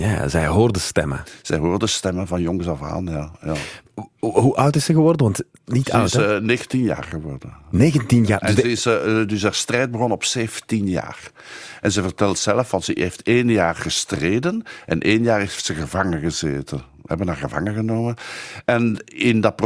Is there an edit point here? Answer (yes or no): no